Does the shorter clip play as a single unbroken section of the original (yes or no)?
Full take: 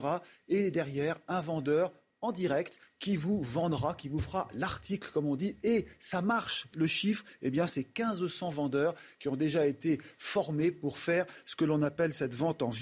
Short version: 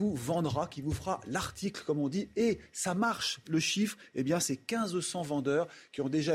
yes